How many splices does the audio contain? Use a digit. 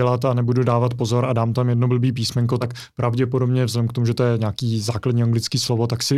0